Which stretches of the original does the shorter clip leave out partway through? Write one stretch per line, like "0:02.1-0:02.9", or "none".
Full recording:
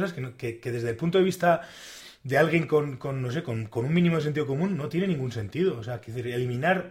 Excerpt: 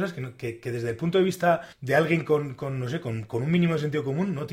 0:01.7-0:02.1